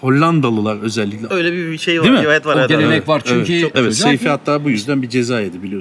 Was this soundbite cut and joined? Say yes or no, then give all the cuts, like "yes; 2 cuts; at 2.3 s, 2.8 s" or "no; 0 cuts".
yes; 2 cuts; at 1.3 s, 3.7 s